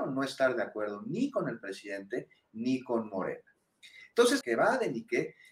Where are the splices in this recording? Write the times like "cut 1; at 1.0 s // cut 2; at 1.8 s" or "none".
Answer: cut 1; at 4.4 s